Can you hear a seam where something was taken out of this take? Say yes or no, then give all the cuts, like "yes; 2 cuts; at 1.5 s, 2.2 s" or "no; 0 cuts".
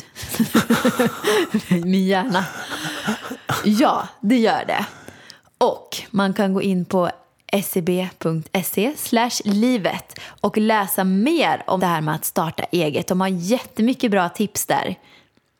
yes; 1 cut; at 11.8 s